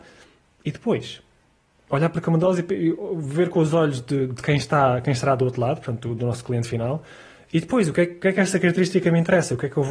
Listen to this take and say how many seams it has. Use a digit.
0